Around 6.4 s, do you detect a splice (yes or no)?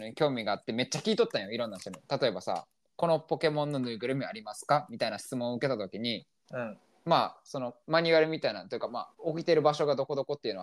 no